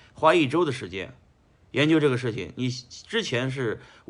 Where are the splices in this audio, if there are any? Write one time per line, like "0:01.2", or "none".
none

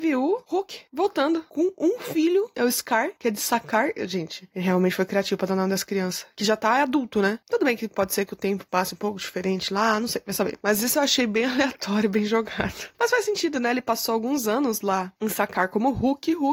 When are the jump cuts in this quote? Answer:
none

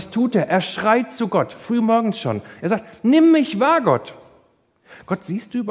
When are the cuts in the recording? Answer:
none

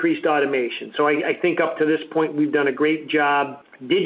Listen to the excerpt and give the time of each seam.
none

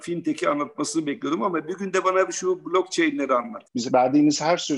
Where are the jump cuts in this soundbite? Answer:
0:03.6

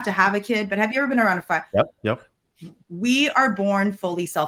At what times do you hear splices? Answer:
none

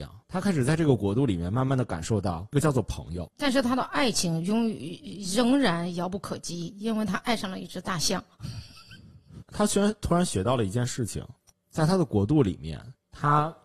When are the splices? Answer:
0:09.4
0:11.5

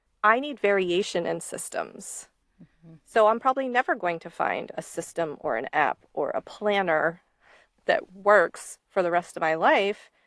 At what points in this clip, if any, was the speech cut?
none

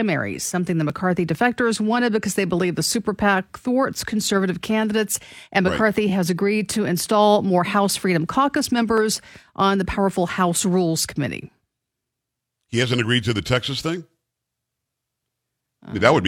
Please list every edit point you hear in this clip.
none

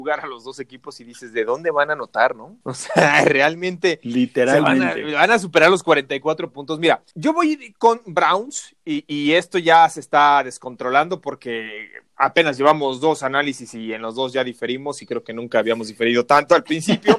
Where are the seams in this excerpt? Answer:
none

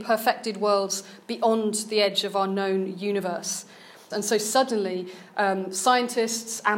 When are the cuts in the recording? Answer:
0:04.1

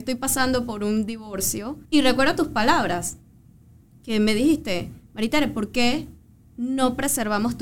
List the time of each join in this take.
0:01.9

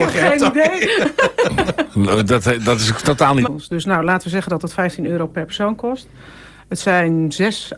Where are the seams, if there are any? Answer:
0:03.5

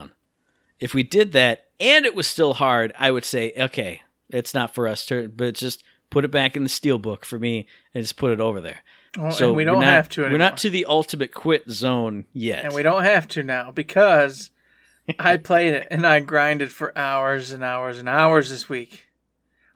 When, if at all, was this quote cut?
0:09.1

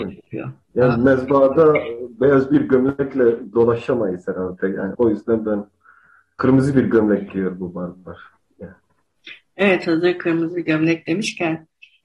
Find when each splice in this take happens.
0:04.9

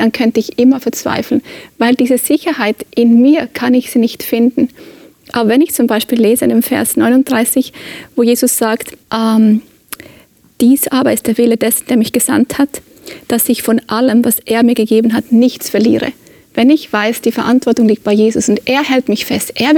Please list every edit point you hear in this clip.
0:09.0

